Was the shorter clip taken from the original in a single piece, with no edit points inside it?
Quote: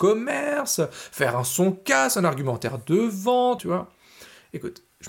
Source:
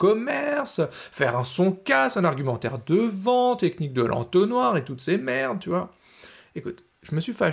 no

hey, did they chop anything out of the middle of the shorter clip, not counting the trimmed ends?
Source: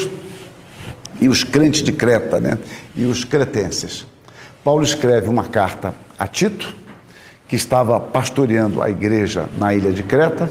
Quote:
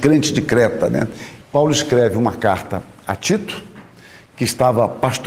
yes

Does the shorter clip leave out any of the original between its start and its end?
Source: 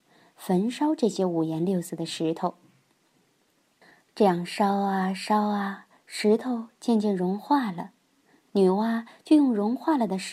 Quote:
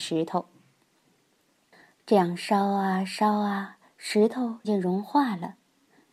yes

